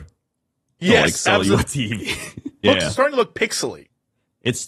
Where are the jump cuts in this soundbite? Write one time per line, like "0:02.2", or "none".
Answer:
0:02.6